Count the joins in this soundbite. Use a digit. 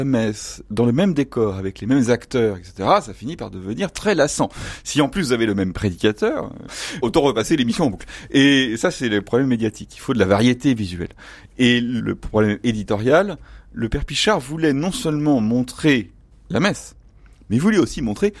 0